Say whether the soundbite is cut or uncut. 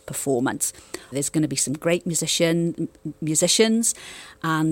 cut